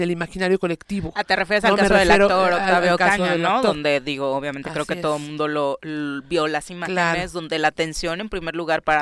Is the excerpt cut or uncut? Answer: uncut